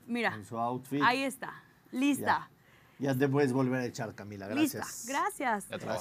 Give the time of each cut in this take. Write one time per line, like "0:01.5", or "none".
none